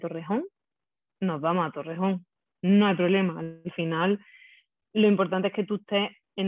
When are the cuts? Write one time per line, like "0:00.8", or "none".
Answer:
none

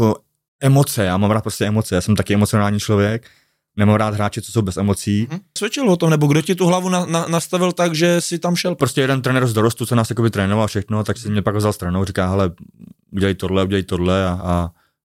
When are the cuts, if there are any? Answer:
0:05.6

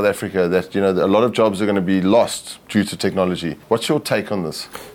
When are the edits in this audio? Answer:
0:03.6

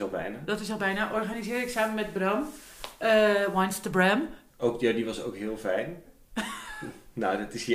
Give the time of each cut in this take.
0:04.5
0:06.0

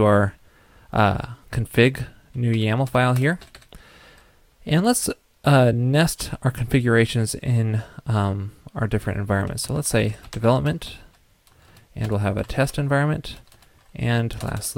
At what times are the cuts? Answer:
none

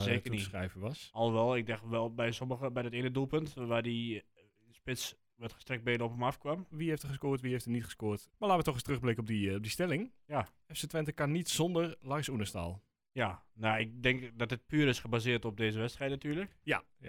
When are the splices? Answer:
0:06.7
0:08.3

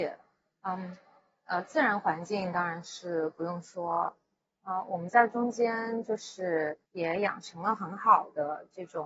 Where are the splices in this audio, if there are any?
0:06.9

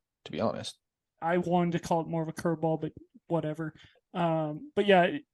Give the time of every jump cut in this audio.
0:01.2

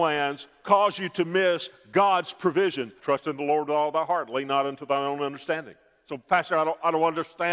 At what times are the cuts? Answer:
0:03.0

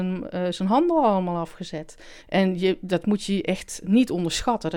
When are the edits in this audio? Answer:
0:02.2

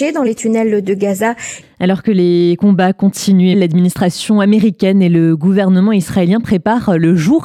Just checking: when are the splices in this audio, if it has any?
0:01.6
0:03.5

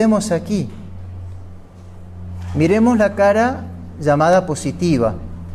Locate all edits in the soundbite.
none

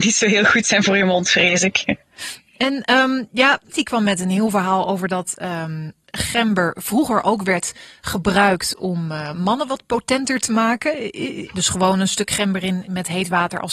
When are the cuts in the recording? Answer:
0:03.7
0:11.5

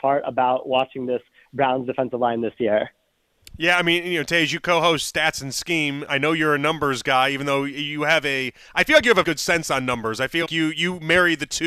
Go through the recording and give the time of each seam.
0:09.2
0:10.5

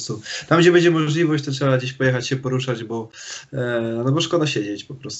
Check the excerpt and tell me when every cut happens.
none

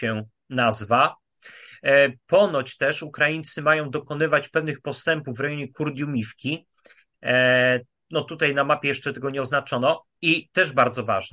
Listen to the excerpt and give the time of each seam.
none

